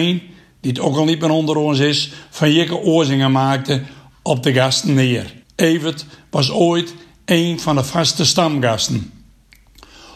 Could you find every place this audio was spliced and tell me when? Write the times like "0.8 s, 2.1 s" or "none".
5.4 s